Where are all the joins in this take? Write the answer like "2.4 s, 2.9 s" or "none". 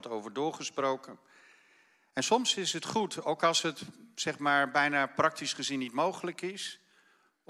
none